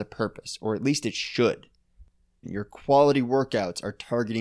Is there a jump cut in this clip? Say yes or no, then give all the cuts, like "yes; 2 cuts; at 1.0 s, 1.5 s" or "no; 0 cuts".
yes; 1 cut; at 2.4 s